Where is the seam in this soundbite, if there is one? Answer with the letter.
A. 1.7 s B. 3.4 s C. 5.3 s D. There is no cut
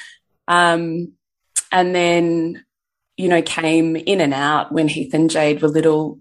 D